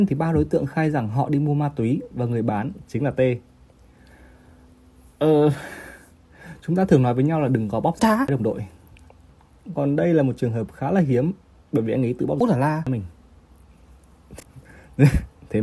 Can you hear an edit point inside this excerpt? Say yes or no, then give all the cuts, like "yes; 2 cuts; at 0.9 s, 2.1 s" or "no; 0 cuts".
no; 0 cuts